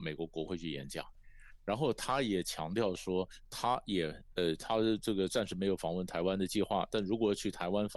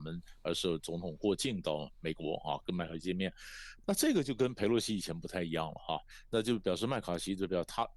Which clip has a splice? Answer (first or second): second